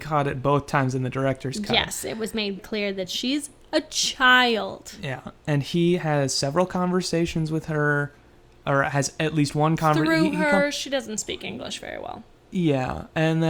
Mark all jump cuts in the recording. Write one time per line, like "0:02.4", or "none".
0:02.6